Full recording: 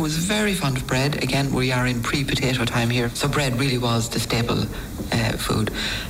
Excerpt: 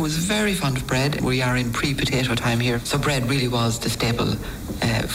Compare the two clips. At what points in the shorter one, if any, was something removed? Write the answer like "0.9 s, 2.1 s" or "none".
1.2 s